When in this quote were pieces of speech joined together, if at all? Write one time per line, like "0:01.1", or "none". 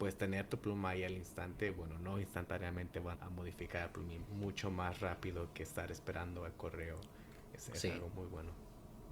0:03.1
0:04.3
0:08.1